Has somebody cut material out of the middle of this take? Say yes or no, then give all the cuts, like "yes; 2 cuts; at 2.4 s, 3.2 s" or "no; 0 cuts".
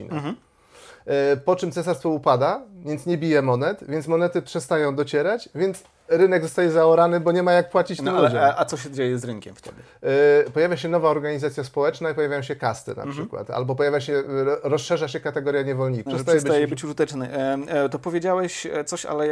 yes; 1 cut; at 16.1 s